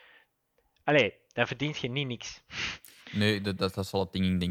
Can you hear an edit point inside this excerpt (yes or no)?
no